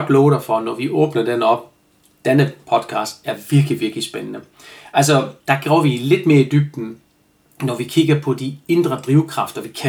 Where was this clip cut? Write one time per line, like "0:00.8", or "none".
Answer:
0:05.4